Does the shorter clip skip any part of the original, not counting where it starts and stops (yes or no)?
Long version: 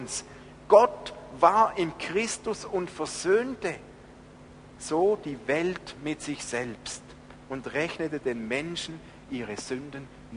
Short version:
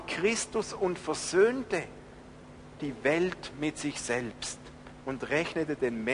yes